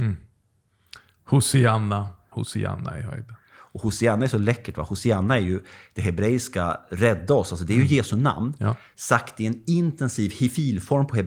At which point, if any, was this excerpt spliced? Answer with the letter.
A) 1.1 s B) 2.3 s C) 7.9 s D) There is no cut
B